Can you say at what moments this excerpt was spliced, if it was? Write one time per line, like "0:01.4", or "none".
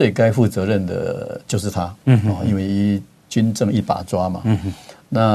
none